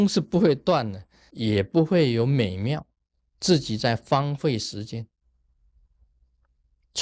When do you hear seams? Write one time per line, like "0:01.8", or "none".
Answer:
0:01.3
0:03.4